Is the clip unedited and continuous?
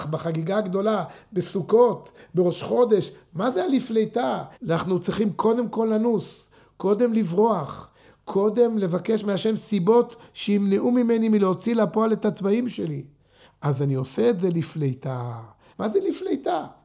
no; 3 cuts; at 4.5 s, 13.4 s, 15.7 s

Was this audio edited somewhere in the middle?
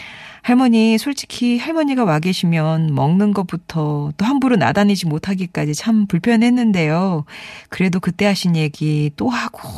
no; 0 cuts

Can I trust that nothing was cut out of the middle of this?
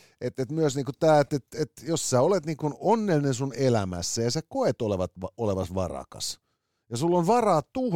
yes; 0 cuts

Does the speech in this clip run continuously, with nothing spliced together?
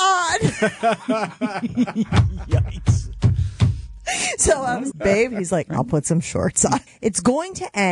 no; 2 cuts; at 4.9 s, 6.9 s

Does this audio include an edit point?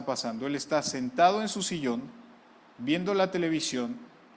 no; 0 cuts

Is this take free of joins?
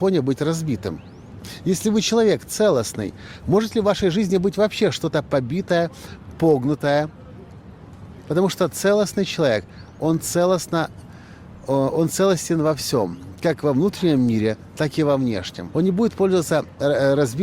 no; 2 cuts; at 8.2 s, 15.7 s

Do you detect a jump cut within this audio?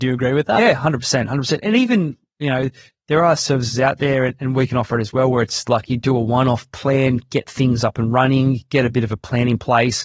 no; 0 cuts

